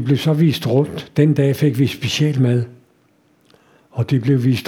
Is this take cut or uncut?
uncut